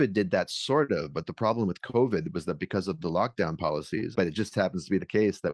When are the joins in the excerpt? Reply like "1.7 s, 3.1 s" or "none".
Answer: 4.1 s